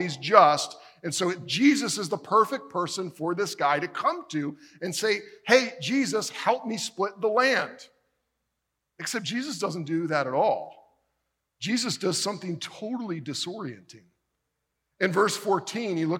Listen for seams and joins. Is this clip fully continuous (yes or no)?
yes